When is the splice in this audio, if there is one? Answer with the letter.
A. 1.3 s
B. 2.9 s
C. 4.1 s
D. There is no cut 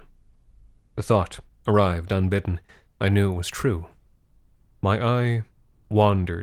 B